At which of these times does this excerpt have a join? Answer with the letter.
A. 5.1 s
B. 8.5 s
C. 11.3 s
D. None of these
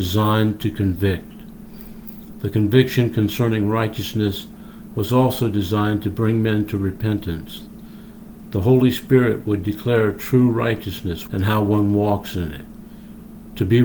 C